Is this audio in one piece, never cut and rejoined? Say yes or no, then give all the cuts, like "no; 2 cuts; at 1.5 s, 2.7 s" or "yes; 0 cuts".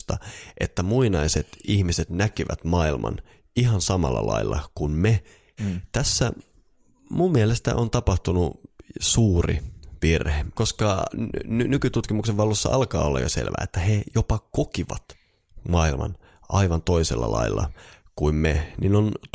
no; 1 cut; at 5.6 s